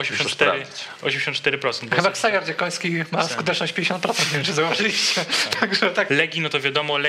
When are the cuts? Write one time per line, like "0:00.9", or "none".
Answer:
0:06.1